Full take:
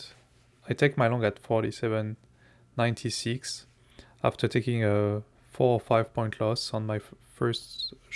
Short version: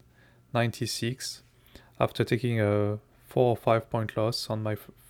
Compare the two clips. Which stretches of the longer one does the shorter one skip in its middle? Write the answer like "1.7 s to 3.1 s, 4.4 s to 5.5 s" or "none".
none